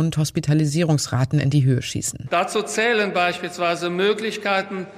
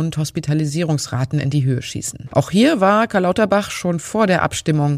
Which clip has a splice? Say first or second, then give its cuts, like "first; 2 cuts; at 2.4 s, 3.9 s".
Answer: second; 1 cut; at 2.3 s